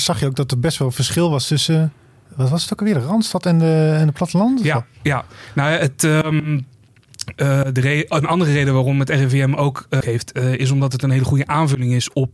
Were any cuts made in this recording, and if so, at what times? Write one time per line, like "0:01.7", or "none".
0:10.0